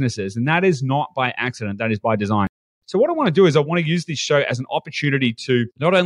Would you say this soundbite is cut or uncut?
uncut